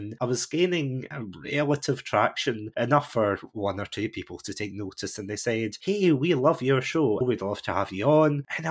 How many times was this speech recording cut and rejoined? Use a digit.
1